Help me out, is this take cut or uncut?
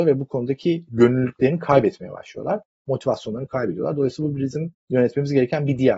uncut